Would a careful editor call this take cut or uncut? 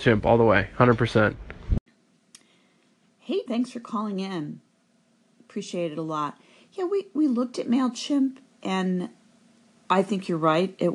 cut